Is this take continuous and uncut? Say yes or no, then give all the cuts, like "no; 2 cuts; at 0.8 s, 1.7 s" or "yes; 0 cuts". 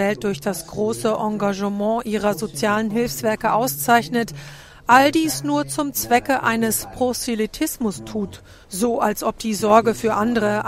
no; 1 cut; at 8.6 s